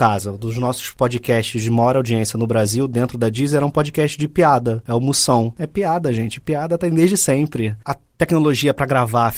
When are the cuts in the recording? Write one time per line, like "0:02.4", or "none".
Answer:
0:07.8